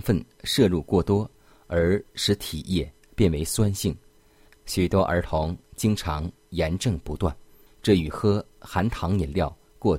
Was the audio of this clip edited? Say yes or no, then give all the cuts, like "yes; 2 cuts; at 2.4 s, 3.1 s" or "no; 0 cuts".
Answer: yes; 2 cuts; at 4.5 s, 7.7 s